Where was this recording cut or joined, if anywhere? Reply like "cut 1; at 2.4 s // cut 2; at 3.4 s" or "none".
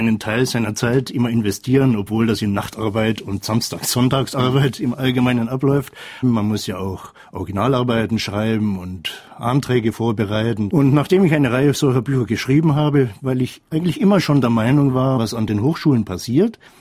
cut 1; at 6.2 s // cut 2; at 10.7 s // cut 3; at 15.2 s